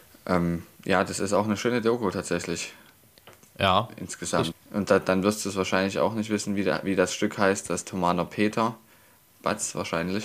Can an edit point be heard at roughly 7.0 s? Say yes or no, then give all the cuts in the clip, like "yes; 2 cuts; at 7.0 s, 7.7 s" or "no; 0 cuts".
no; 1 cut; at 4.5 s